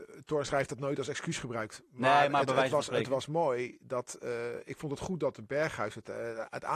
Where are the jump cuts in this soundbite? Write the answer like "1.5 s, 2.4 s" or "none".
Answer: none